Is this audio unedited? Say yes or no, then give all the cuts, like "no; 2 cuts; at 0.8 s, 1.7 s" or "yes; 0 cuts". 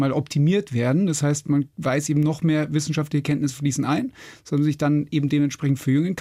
yes; 0 cuts